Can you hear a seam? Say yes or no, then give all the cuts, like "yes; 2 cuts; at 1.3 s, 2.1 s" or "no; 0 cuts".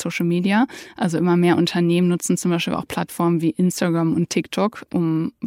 no; 0 cuts